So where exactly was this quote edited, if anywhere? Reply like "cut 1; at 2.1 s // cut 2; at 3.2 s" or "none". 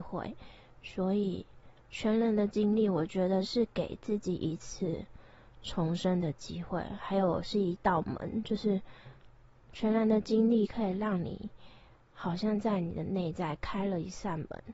cut 1; at 1.8 s